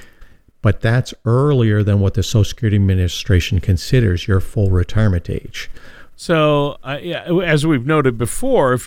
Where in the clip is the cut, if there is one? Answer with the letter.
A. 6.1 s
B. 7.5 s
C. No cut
A